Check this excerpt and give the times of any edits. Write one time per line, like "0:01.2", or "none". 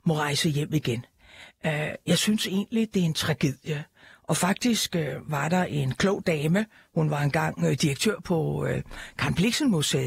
none